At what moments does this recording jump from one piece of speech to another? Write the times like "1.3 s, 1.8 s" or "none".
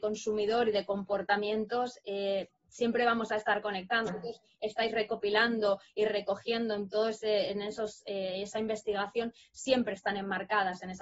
4.1 s